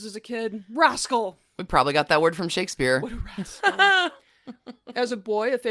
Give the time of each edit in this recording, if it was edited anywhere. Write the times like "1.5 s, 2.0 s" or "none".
none

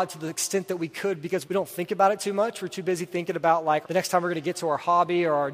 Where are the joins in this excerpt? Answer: 1.4 s, 3.8 s

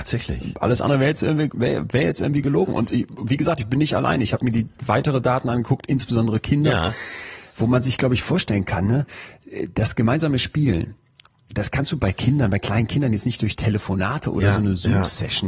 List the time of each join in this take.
none

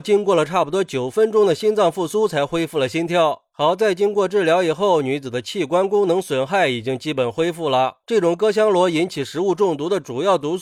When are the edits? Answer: 8.0 s

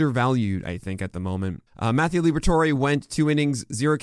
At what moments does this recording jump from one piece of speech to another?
1.7 s

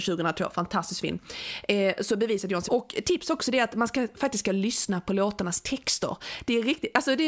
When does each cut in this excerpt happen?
2.7 s

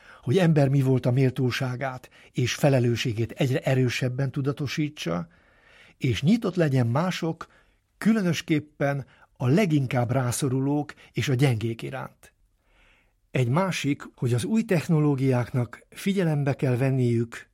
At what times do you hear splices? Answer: 14.1 s

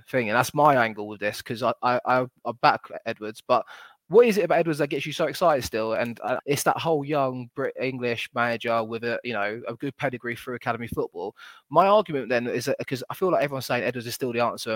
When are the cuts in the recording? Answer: 6.4 s

